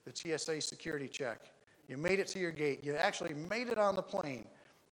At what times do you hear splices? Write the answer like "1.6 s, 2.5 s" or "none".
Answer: none